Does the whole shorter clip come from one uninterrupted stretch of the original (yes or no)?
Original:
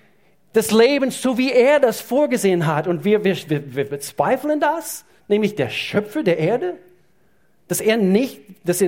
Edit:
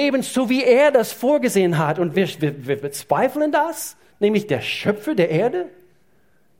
no